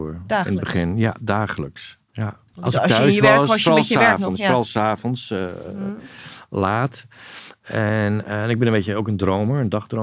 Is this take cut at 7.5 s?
no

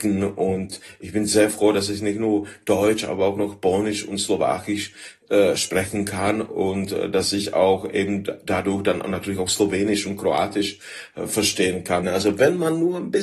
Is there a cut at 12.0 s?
yes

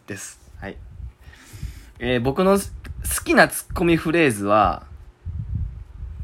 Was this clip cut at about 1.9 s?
no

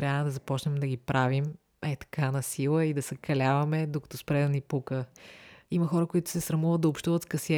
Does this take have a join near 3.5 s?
no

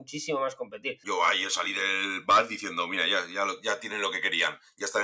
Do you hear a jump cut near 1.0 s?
yes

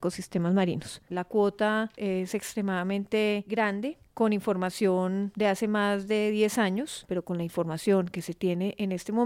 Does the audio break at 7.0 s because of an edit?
no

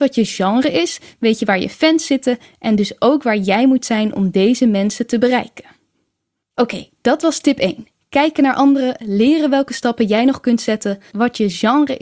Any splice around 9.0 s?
no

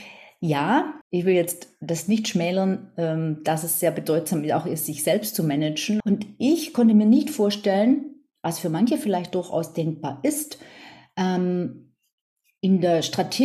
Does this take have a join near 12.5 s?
no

